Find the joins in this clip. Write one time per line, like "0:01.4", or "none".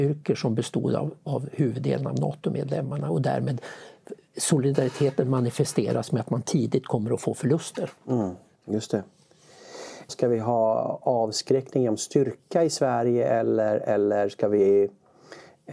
0:08.5
0:10.1